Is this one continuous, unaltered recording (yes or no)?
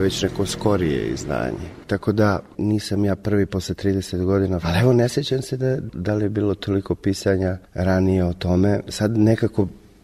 no